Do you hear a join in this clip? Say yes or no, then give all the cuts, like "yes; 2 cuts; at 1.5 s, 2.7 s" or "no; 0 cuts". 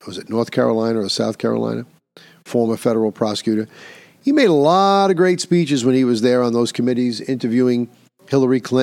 no; 0 cuts